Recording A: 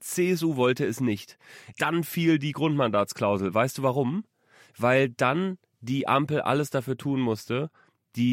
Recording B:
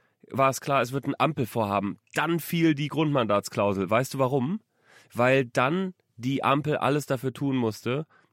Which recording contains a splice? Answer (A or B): A